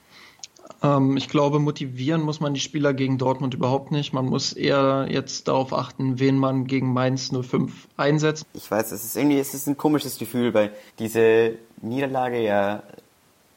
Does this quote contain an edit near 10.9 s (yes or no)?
yes